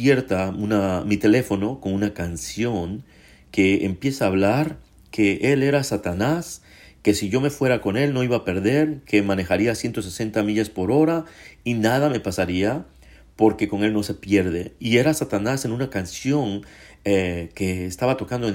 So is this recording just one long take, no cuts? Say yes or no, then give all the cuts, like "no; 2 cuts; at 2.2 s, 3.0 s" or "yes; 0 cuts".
yes; 0 cuts